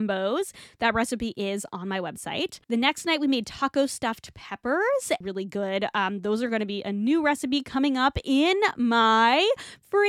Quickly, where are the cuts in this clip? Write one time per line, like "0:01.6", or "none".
0:02.6
0:05.2